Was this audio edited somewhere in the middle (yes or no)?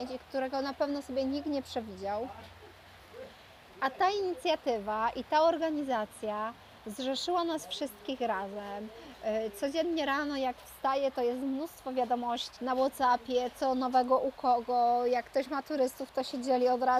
yes